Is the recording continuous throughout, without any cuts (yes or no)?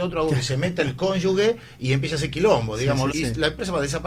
no